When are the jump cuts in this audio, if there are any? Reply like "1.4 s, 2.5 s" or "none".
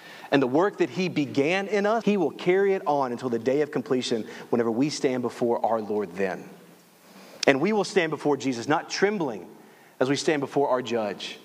2.0 s